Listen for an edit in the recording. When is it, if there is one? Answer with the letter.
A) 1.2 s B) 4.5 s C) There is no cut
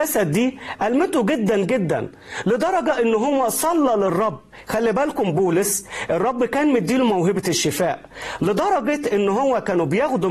C